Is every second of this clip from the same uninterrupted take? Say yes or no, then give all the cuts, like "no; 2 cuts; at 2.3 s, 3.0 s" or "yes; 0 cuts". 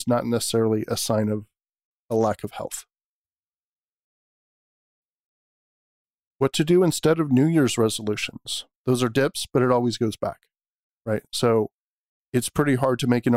no; 2 cuts; at 6.3 s, 8.8 s